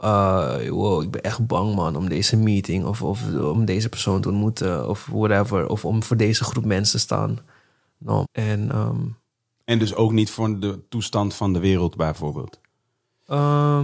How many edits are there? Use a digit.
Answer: 1